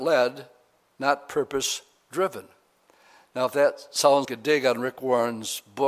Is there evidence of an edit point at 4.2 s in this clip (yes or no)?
yes